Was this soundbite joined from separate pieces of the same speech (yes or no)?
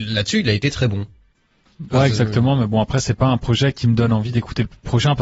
no